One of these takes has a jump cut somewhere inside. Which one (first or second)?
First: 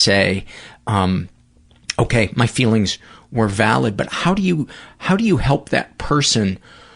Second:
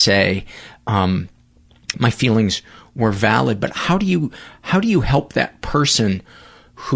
second